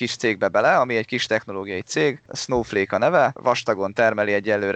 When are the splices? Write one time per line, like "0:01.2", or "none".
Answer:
none